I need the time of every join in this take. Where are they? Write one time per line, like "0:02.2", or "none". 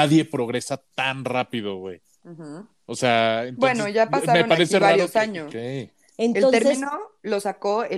0:05.5